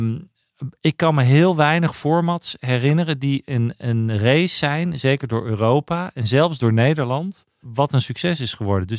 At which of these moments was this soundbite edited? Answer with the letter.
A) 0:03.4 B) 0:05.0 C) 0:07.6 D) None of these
C